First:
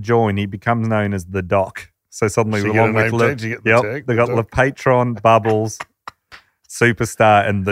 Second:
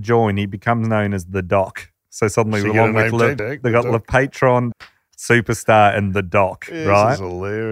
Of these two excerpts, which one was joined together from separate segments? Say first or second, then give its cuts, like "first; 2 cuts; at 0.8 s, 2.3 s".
second; 2 cuts; at 3.4 s, 4.7 s